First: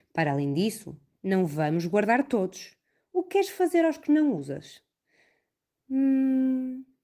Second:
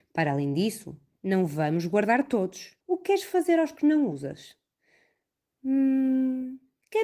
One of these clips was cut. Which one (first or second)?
second